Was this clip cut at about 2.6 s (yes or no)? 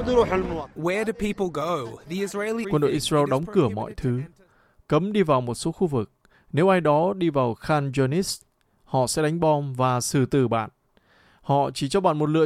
yes